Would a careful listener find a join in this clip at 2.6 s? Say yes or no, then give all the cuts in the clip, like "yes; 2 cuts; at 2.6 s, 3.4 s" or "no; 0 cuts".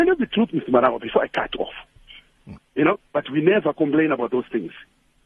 yes; 1 cut; at 2.6 s